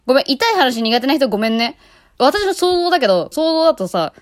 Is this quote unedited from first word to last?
no; 2 cuts; at 2.2 s, 3.3 s

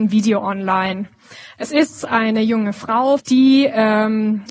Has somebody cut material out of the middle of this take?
yes; 1 cut; at 3.2 s

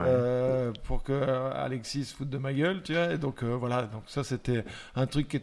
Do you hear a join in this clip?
no; 0 cuts

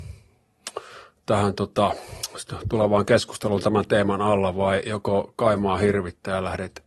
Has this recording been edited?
no; 0 cuts

